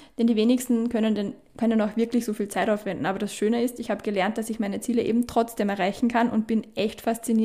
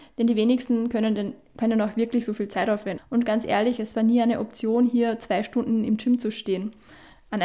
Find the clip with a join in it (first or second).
second